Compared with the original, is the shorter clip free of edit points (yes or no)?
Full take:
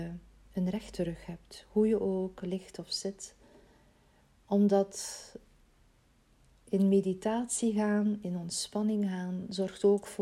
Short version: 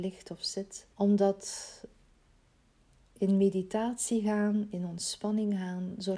no